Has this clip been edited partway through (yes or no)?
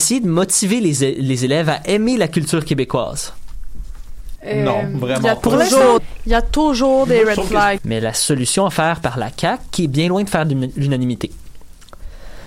yes